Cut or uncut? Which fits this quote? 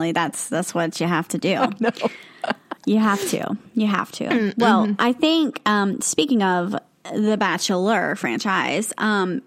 uncut